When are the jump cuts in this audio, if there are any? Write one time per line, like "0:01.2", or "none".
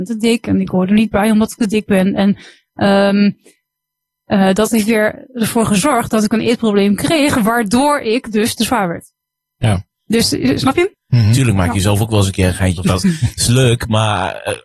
0:10.9
0:12.8